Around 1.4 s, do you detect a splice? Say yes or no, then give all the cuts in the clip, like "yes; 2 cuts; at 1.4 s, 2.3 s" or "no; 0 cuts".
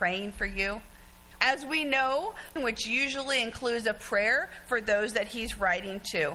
yes; 2 cuts; at 1.4 s, 2.6 s